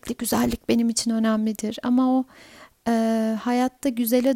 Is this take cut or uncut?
uncut